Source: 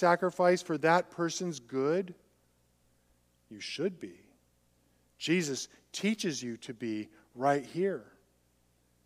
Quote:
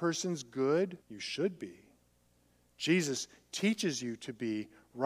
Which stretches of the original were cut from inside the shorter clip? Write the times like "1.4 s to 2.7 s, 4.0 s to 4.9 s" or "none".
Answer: 2.2 s to 3.4 s